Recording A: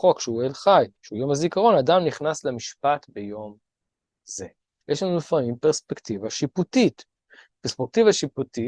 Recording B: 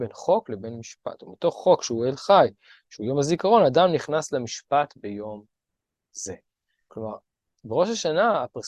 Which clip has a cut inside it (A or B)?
A